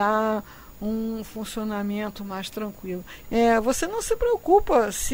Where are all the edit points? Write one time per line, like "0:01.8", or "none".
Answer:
0:03.2